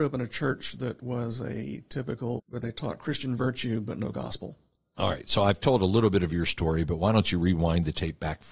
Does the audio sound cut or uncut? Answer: cut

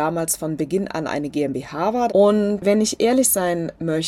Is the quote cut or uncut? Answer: cut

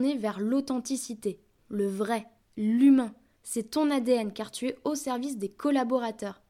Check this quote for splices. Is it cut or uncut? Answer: uncut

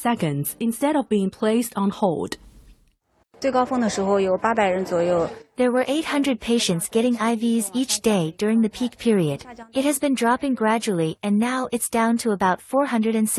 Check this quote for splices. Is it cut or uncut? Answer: cut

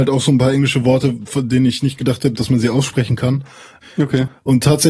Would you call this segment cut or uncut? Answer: cut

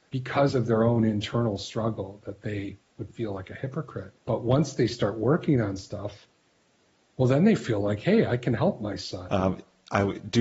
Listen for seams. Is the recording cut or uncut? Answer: cut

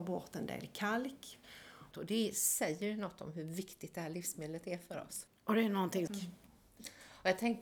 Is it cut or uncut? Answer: cut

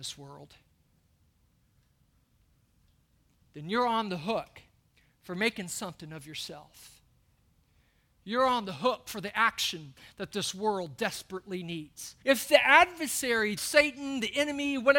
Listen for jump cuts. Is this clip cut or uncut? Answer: cut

